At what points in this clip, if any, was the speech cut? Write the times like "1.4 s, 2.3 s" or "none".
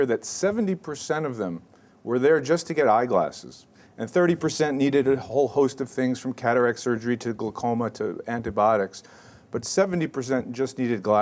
none